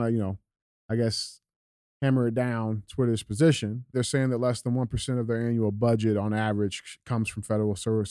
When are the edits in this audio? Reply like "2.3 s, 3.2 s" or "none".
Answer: 3.9 s